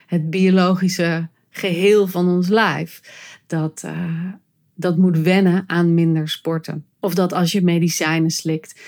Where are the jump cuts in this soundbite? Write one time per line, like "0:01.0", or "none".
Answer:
0:06.9